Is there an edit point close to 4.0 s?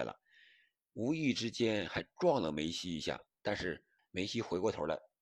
yes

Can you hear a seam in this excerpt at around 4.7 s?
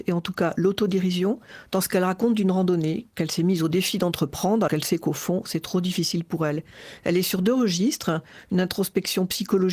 yes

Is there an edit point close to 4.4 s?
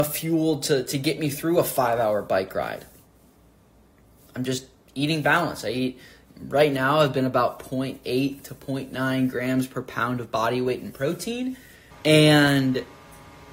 no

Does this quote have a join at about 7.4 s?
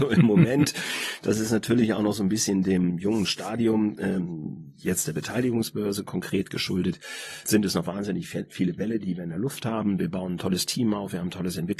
yes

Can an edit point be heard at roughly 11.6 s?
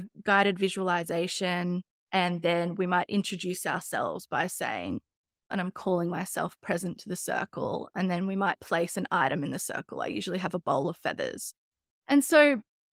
no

